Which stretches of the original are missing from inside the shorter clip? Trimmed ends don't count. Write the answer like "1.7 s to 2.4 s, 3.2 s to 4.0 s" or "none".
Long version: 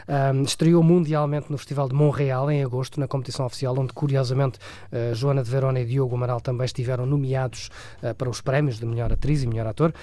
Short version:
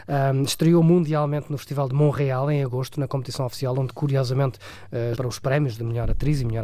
5.1 s to 8.2 s